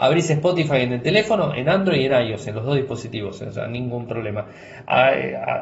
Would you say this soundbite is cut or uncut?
uncut